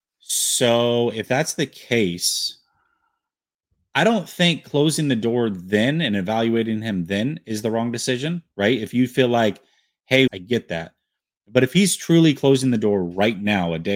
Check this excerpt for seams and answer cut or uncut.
cut